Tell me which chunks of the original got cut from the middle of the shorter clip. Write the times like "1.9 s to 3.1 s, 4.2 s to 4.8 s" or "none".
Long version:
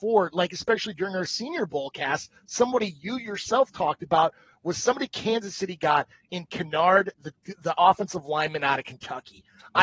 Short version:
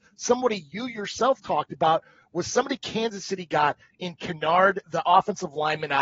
7.1 s to 7.6 s